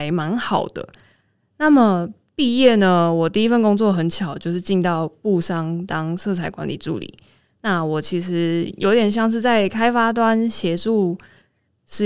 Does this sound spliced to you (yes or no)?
no